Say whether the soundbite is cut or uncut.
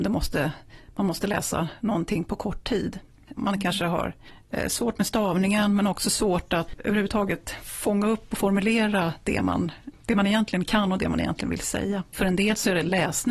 cut